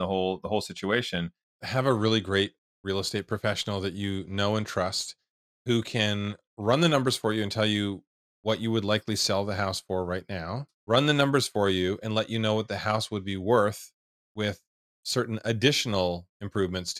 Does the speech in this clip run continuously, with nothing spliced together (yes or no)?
no